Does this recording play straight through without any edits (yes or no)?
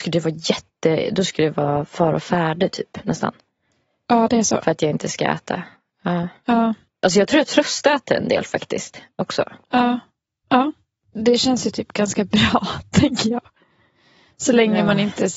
yes